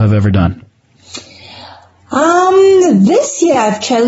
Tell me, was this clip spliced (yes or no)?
no